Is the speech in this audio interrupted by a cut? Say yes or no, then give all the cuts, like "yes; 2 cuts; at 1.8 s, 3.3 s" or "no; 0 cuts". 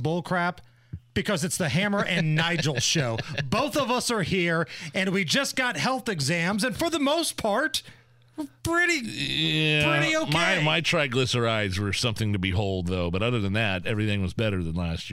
no; 0 cuts